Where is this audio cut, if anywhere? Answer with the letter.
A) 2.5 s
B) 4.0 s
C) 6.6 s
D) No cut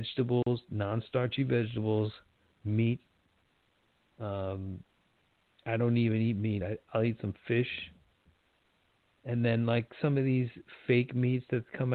D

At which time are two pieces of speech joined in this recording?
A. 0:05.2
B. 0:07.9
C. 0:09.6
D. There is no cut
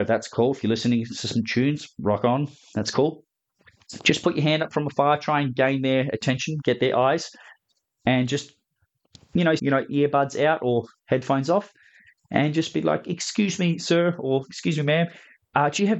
C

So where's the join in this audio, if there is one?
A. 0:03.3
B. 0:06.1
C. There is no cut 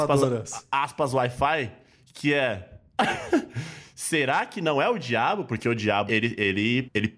B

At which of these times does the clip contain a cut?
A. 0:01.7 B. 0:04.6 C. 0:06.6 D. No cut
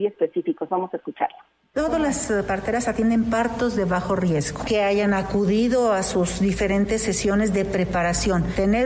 B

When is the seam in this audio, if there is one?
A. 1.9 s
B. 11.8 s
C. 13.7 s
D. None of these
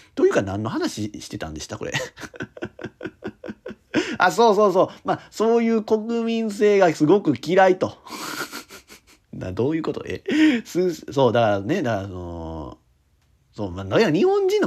D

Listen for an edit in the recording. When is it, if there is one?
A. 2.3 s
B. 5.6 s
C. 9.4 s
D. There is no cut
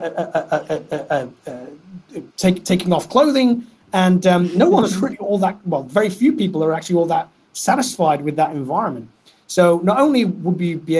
A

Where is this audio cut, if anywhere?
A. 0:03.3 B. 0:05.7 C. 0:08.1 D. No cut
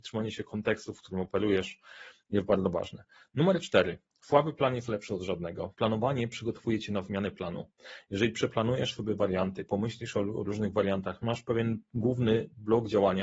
B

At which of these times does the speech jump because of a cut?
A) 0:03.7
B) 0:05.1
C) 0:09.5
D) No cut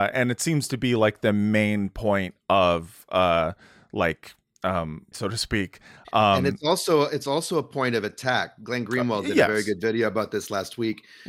B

